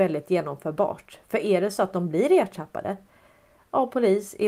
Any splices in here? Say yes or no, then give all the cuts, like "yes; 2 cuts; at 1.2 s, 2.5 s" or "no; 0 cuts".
no; 0 cuts